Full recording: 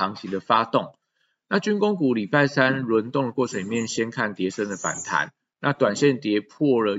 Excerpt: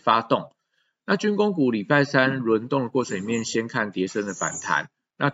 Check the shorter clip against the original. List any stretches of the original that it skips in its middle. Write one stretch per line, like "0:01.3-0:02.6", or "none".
none